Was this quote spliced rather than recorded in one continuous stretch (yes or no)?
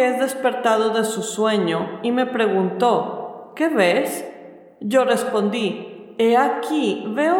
no